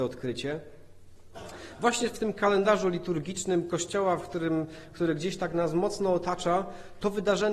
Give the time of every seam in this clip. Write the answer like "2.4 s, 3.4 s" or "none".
none